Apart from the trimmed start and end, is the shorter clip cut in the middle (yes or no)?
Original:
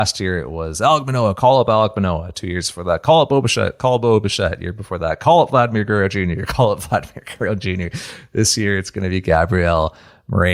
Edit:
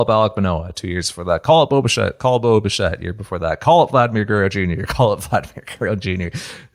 no